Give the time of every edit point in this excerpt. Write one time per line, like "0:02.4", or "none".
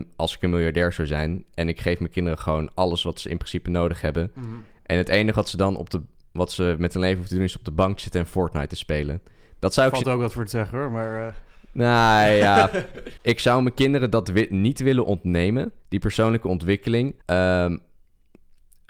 0:13.2
0:15.8
0:17.2